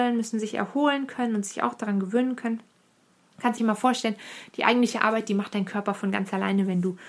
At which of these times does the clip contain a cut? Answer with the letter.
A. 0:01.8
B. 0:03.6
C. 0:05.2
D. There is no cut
B